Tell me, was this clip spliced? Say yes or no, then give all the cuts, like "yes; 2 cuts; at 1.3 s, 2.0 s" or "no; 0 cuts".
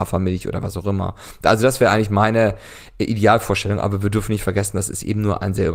no; 0 cuts